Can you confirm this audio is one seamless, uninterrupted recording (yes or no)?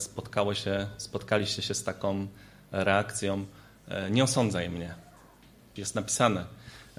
no